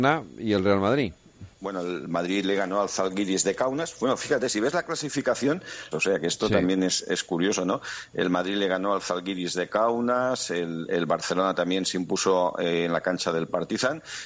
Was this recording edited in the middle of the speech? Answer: yes; 2 cuts; at 1.5 s, 5.9 s

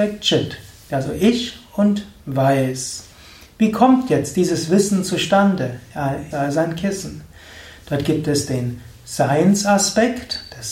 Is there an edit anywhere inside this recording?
yes; 3 cuts; at 1.0 s, 3.4 s, 6.3 s

